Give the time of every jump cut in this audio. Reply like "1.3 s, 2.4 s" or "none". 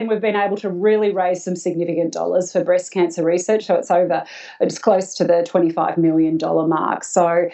none